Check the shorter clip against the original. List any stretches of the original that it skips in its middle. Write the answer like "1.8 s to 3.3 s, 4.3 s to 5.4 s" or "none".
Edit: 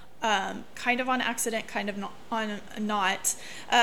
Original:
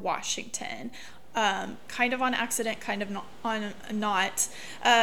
none